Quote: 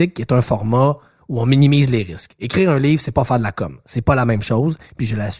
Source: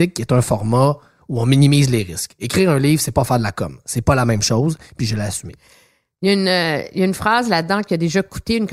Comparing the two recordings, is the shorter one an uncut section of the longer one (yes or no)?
yes